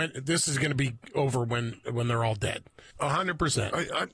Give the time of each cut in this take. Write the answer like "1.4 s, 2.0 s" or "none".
2.9 s